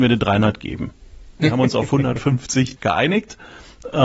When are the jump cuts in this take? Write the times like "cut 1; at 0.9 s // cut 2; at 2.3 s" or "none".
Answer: cut 1; at 1.4 s // cut 2; at 2.8 s

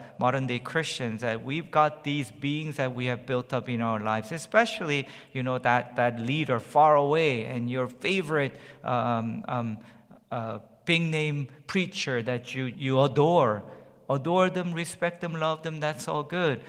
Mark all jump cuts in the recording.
cut 1; at 12.7 s

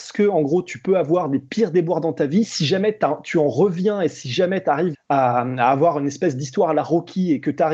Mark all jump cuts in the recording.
cut 1; at 4.9 s

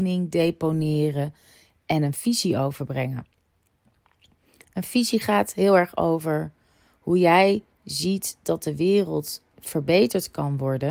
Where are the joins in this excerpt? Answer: none

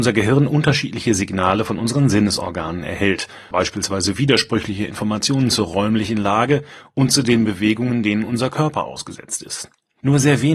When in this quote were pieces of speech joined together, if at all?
cut 1; at 3.5 s

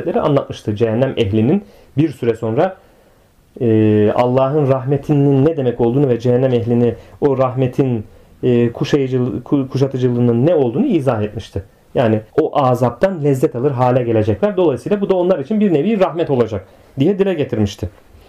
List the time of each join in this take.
cut 1; at 12.3 s

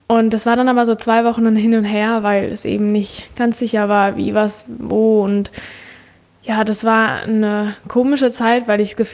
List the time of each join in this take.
none

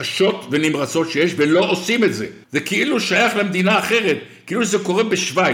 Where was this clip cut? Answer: none

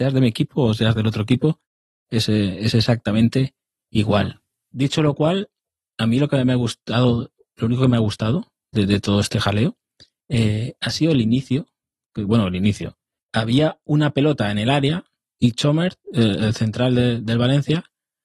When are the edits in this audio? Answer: cut 1; at 13.2 s

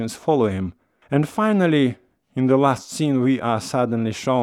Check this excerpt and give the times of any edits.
cut 1; at 1.0 s

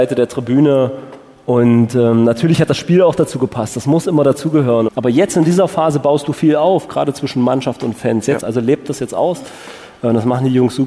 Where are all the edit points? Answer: cut 1; at 4.9 s // cut 2; at 8.4 s

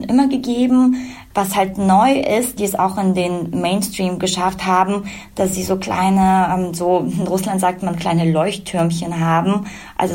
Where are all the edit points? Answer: cut 1; at 1.3 s // cut 2; at 2.6 s

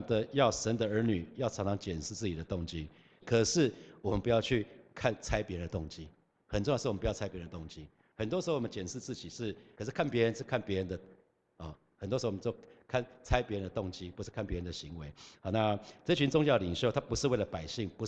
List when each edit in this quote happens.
cut 1; at 3.2 s // cut 2; at 9.8 s

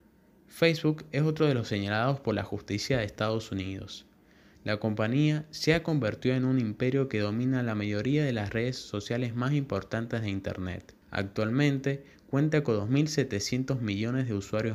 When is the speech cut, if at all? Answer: cut 1; at 11.0 s

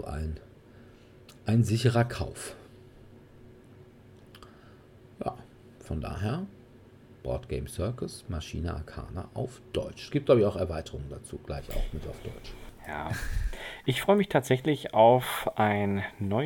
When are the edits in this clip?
none

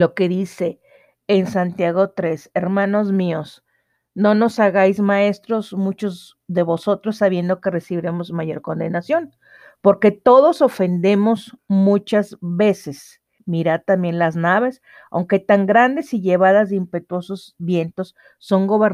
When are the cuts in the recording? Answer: cut 1; at 13.4 s

